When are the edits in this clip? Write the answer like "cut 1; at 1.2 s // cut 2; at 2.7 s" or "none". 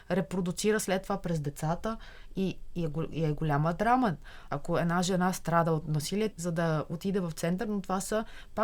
cut 1; at 4.5 s // cut 2; at 6.3 s